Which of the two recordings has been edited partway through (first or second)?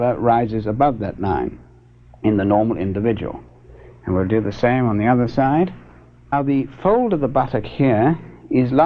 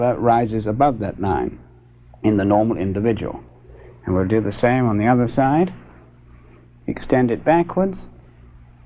first